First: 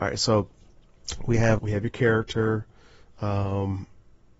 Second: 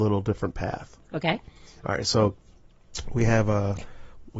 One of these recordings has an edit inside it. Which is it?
first; 1 cut; at 1.6 s

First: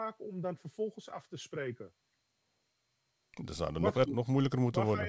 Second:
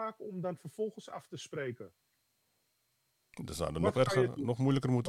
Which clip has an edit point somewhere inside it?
first; 1 cut; at 4.0 s

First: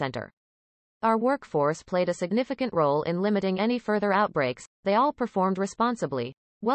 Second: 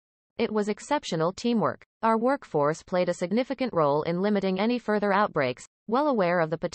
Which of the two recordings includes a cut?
second; 2 cuts; at 1.9 s, 5.7 s

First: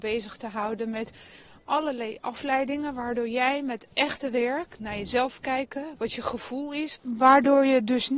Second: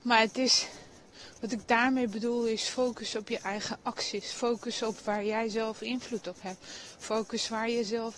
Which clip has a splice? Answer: first; 2 cuts; at 6.0 s, 7.0 s

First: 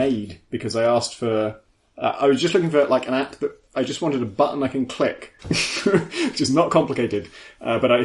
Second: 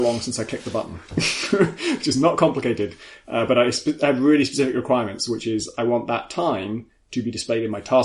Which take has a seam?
first; 1 cut; at 5.4 s

